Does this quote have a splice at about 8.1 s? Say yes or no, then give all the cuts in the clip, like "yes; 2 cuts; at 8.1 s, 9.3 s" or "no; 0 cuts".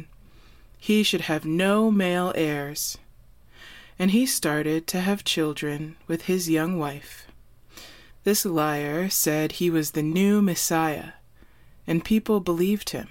yes; 1 cut; at 8.1 s